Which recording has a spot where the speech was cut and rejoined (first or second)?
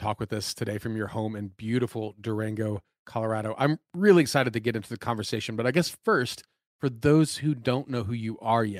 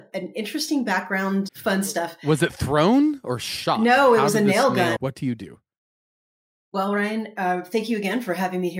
second